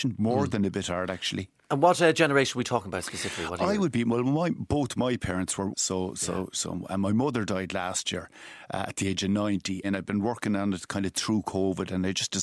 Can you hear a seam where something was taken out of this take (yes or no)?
yes